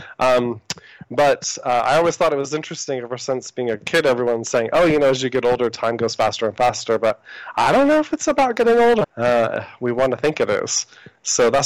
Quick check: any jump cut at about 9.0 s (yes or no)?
yes